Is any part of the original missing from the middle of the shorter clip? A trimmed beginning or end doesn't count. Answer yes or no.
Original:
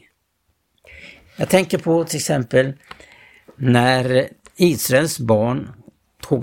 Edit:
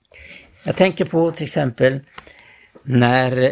no